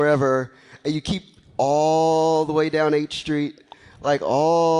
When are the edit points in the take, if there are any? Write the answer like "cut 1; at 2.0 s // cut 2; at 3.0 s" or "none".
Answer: none

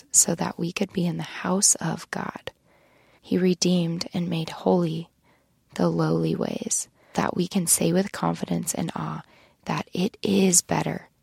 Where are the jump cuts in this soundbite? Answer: cut 1; at 3.2 s // cut 2; at 7.1 s

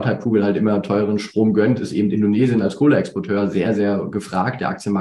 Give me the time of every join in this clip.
none

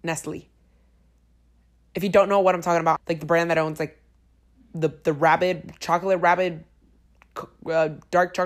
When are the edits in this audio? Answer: cut 1; at 3.0 s

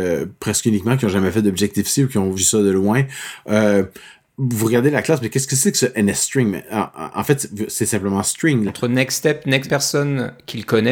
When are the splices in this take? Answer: cut 1; at 2.3 s // cut 2; at 8.7 s // cut 3; at 9.7 s

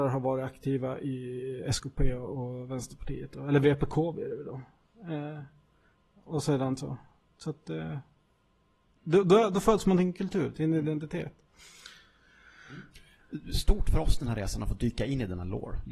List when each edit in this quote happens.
none

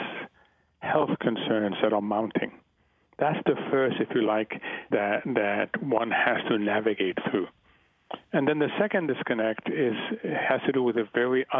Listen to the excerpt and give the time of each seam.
cut 1; at 4.9 s

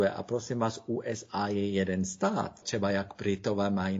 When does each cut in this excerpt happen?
cut 1; at 2.6 s

